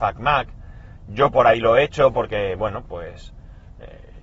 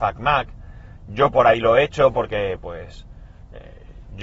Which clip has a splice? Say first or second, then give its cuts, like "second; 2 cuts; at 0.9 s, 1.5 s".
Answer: second; 1 cut; at 2.6 s